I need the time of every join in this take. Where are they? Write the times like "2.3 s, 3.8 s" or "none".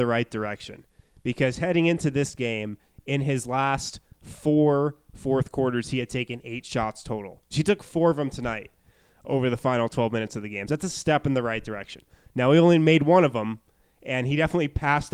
7.5 s, 10.7 s